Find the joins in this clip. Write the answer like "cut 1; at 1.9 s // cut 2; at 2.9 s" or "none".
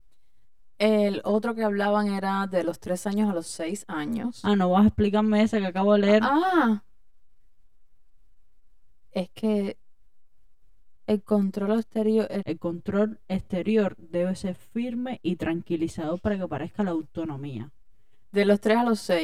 cut 1; at 11.0 s // cut 2; at 12.4 s // cut 3; at 18.3 s